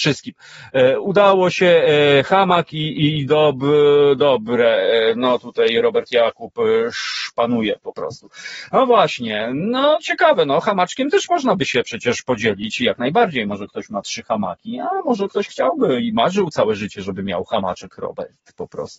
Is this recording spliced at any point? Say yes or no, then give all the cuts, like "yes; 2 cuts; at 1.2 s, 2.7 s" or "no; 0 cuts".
no; 0 cuts